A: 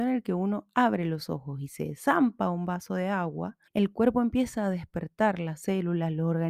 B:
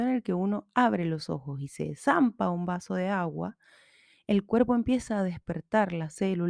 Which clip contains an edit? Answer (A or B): A